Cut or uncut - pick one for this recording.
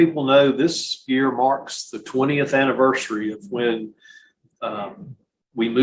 uncut